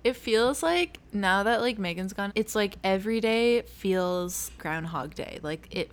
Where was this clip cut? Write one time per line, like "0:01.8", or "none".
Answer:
0:02.3
0:04.6